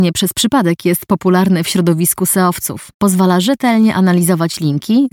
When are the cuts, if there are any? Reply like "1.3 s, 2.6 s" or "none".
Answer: 2.9 s